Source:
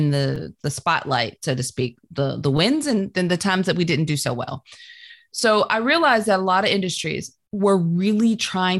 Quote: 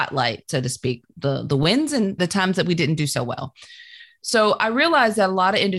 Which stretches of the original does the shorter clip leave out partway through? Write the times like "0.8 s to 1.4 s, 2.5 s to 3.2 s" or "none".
3.1 s to 3.3 s